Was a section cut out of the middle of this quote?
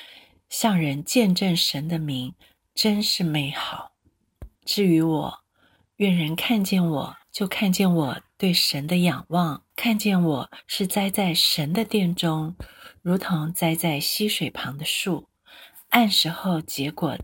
yes; 3 cuts; at 4.6 s, 7.2 s, 9.7 s

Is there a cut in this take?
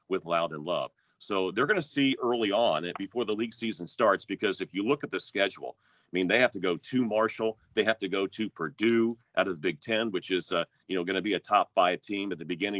no; 0 cuts

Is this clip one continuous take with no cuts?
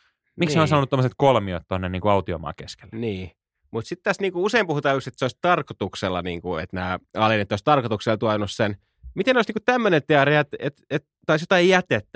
yes; 0 cuts

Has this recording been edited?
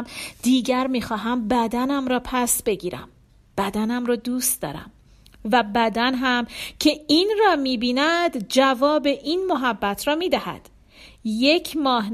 no; 0 cuts

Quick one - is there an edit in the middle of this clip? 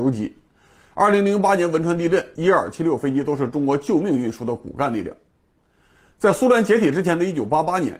yes; 1 cut; at 2.3 s

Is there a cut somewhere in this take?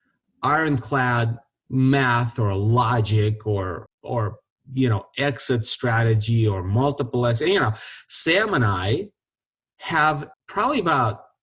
yes; 2 cuts; at 3.9 s, 10.3 s

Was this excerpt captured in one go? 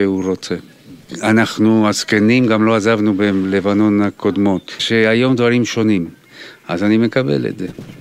no; 1 cut; at 4.8 s

